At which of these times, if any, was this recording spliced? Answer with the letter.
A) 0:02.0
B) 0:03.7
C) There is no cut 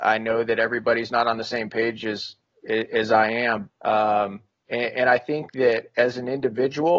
B